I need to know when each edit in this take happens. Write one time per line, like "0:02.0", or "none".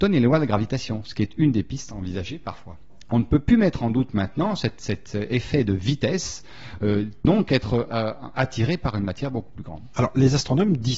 0:03.1
0:07.2